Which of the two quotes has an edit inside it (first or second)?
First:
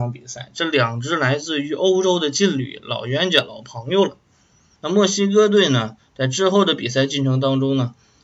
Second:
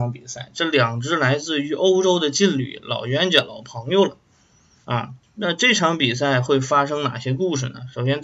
first